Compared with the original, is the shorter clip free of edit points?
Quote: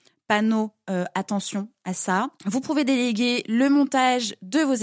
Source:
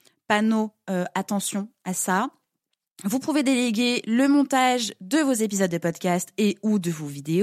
no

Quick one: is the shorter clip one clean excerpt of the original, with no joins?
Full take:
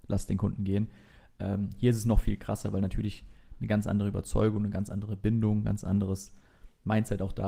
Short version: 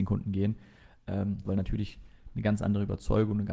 no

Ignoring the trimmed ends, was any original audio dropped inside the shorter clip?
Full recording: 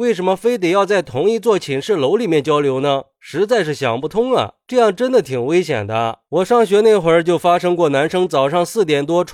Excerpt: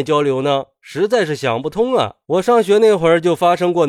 yes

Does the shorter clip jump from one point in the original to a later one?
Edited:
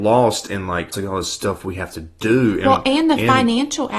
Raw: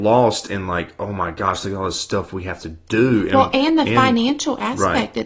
yes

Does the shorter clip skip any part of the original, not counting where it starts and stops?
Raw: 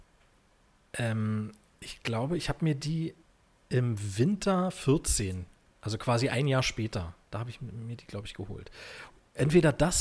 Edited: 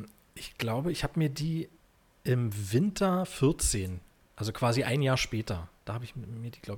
no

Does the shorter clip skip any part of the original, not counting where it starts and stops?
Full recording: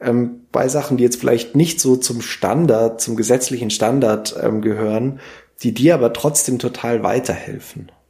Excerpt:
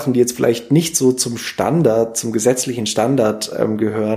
no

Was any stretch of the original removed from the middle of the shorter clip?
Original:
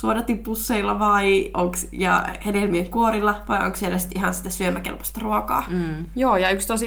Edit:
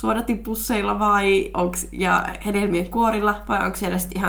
no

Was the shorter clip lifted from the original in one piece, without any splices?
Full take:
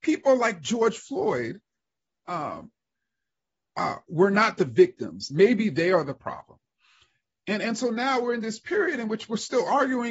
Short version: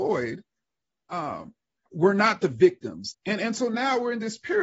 no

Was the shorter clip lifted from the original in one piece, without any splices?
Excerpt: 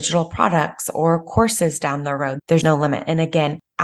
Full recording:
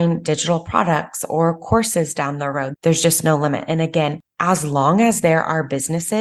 no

